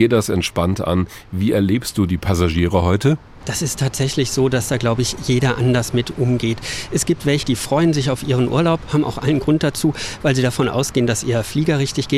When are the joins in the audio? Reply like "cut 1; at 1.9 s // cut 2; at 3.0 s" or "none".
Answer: cut 1; at 7.4 s